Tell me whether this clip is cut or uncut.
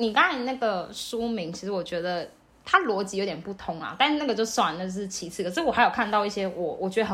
uncut